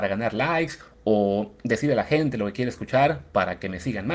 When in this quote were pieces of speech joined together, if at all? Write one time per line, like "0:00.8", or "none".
none